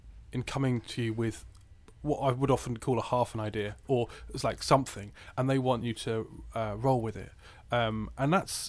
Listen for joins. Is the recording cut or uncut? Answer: uncut